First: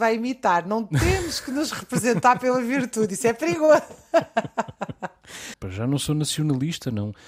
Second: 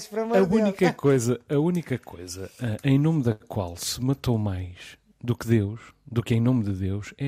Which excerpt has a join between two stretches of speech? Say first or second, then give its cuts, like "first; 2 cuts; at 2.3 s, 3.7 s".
first; 1 cut; at 5.5 s